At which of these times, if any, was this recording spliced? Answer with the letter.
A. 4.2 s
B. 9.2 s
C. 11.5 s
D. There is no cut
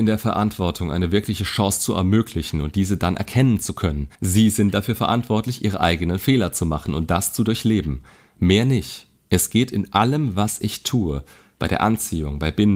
A